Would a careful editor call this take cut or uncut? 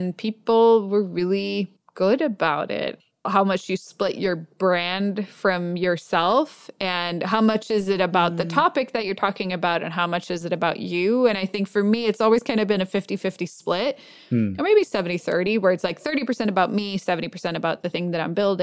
uncut